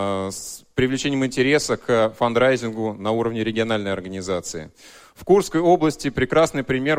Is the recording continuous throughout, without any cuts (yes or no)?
yes